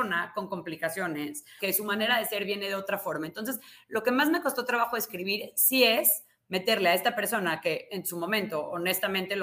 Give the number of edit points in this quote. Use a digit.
1